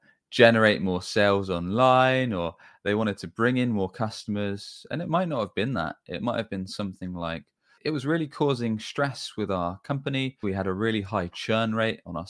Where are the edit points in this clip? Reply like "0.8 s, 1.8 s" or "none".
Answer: 7.8 s, 10.4 s